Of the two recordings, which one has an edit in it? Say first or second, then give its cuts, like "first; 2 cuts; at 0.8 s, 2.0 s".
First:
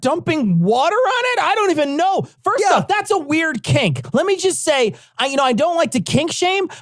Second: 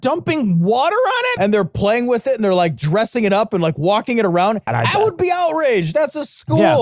second; 2 cuts; at 1.4 s, 4.7 s